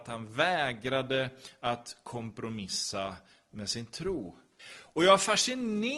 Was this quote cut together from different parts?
yes; 1 cut; at 4.6 s

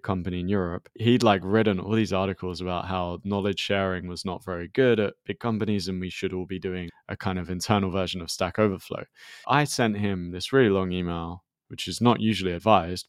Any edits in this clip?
no; 0 cuts

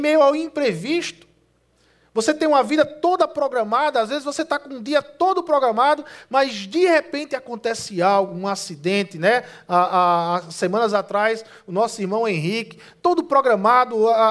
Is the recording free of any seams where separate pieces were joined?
yes; 0 cuts

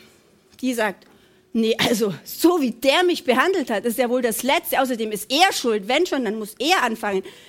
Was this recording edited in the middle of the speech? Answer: no; 0 cuts

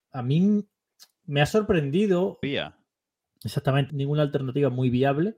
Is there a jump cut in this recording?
yes; 2 cuts; at 2.4 s, 3.9 s

